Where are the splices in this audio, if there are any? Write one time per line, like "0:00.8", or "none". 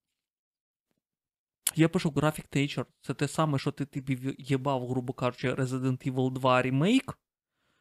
none